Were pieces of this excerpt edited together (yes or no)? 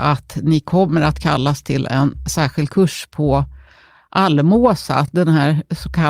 no